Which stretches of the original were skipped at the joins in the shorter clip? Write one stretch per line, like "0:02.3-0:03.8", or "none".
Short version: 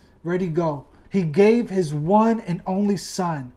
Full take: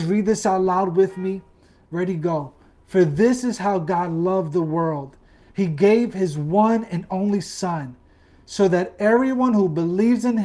0:02.7-0:05.5